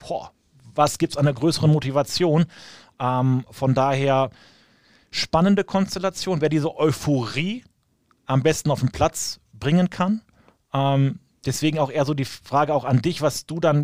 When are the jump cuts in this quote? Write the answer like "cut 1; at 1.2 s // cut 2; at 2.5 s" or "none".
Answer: none